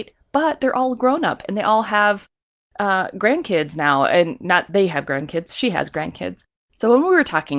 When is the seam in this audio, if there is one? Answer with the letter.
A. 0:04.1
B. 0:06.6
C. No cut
B